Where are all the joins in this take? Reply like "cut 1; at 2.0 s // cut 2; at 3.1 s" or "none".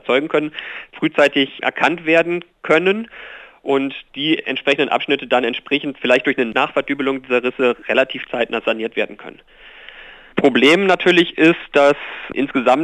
cut 1; at 1.6 s